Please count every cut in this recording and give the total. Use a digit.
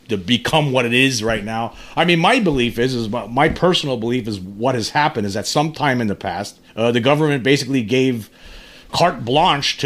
2